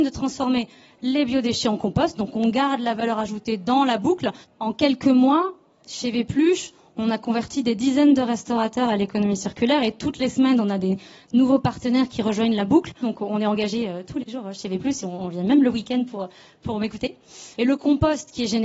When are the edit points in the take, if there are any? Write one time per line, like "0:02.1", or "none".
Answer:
0:04.4
0:13.0
0:17.5